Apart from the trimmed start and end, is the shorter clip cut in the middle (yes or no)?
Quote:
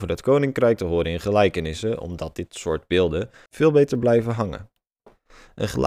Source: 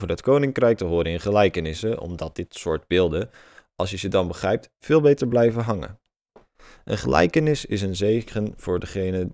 yes